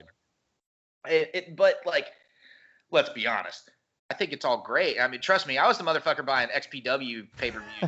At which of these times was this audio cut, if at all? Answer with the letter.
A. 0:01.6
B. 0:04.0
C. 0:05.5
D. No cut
B